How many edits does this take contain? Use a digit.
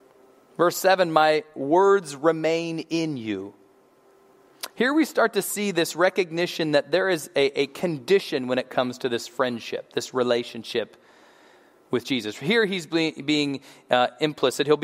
0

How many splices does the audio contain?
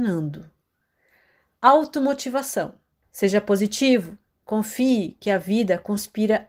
1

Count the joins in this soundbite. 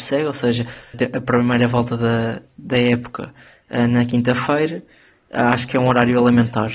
1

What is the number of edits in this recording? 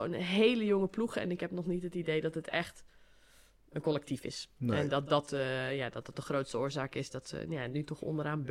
0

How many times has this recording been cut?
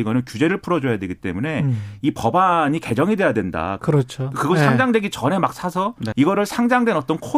2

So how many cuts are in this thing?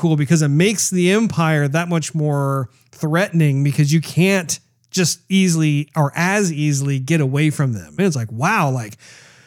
1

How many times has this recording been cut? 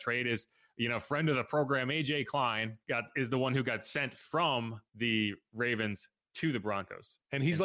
2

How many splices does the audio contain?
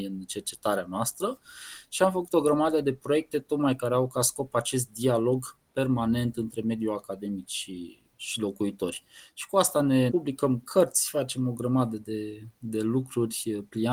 1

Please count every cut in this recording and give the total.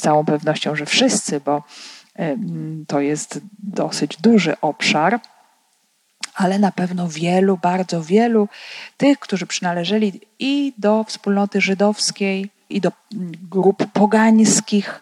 1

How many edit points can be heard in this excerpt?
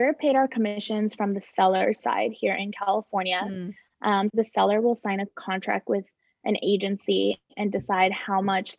1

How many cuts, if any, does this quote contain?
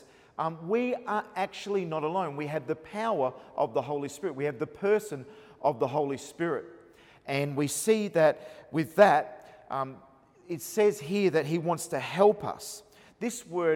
0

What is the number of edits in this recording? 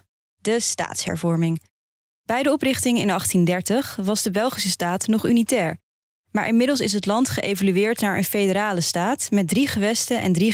0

